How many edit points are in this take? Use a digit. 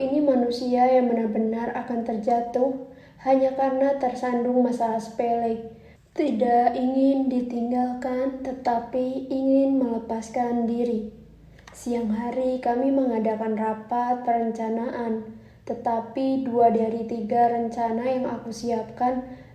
1